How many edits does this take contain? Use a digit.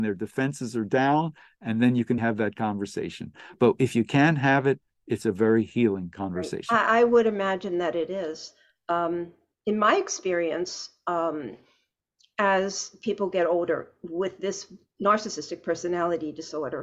1